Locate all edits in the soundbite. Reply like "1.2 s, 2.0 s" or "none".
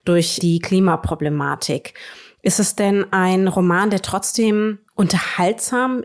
4.9 s

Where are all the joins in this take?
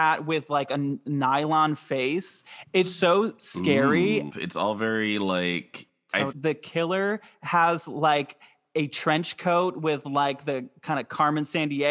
4.3 s, 6.3 s

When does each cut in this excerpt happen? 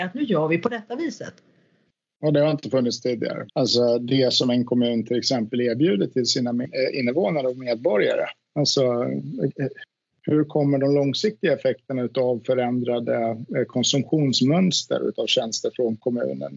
3.5 s

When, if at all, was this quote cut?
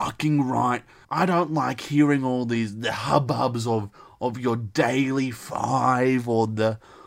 1.0 s

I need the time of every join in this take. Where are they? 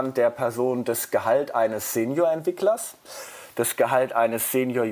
none

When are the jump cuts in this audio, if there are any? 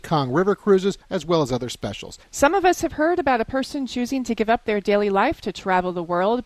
2.2 s

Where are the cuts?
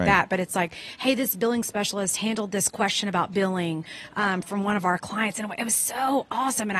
none

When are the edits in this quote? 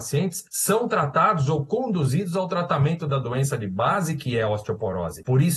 none

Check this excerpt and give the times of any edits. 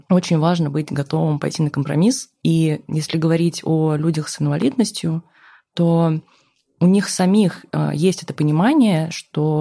none

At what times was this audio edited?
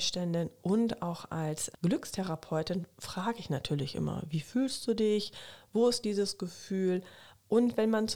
1.7 s

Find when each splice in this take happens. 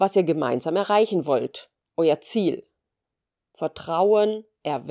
none

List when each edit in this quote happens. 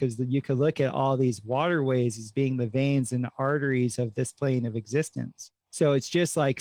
5.6 s

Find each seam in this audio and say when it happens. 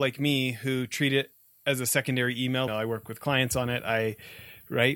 2.7 s

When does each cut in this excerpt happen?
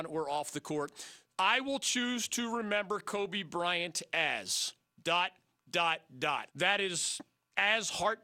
1.3 s, 6.5 s

